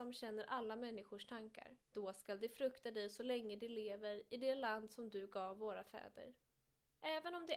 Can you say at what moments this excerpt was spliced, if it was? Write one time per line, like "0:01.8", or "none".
0:01.8